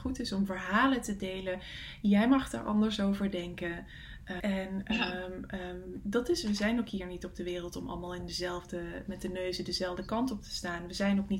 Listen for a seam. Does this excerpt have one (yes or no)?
yes